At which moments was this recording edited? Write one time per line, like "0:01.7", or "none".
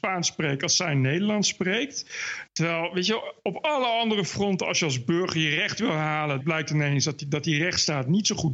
0:02.5
0:06.4